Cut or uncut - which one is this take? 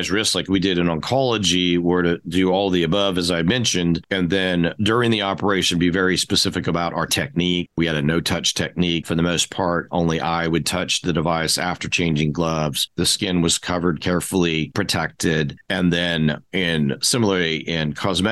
uncut